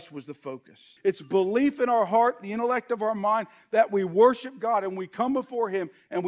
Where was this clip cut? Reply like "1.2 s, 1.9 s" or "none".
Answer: 1.0 s